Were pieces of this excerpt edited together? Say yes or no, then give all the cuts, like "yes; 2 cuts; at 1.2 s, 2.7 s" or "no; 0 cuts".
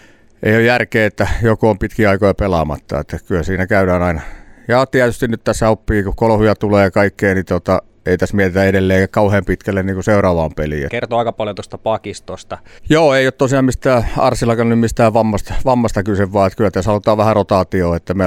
yes; 2 cuts; at 10.9 s, 12.8 s